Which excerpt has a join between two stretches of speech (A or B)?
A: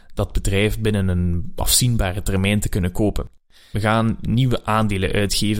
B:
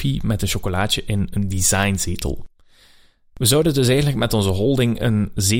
A